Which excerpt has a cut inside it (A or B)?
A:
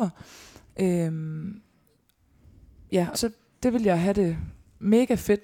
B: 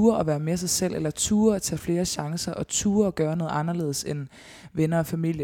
A